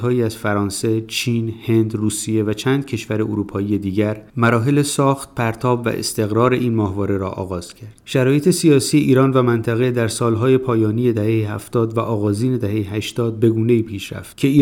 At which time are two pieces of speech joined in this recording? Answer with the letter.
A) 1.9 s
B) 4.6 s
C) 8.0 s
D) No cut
C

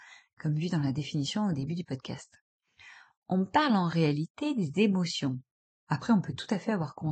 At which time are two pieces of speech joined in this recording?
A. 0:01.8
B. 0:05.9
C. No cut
B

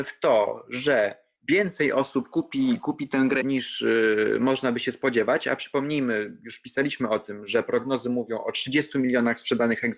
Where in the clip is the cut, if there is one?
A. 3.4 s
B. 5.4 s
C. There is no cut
A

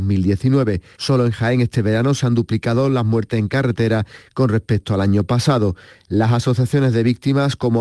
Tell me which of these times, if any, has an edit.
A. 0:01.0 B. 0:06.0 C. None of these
A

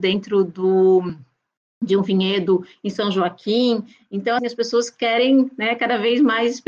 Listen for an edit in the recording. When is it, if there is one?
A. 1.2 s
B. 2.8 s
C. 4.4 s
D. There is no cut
C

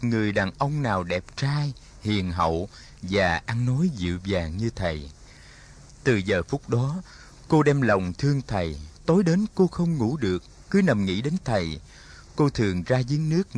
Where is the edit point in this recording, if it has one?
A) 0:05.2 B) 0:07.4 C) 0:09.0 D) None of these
C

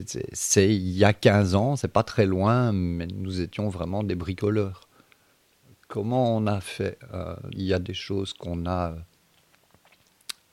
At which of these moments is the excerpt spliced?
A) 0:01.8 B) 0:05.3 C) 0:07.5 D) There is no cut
C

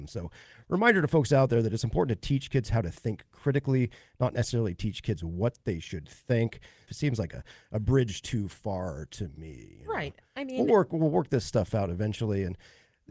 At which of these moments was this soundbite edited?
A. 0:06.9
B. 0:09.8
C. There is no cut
A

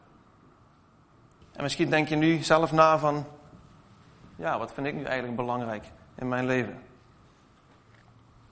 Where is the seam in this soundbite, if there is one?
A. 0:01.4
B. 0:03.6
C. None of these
A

